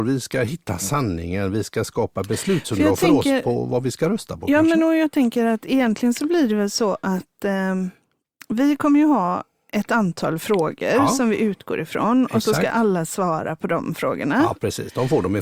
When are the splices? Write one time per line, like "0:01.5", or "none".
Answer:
none